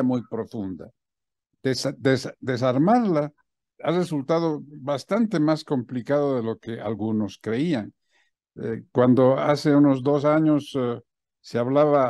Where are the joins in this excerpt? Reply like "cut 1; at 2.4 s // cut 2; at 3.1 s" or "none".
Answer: cut 1; at 8.3 s